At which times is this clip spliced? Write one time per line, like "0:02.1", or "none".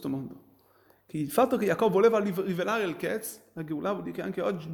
none